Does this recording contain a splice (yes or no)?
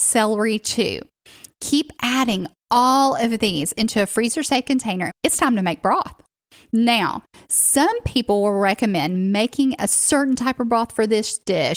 yes